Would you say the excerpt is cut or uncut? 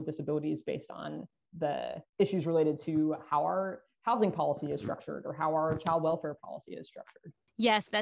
cut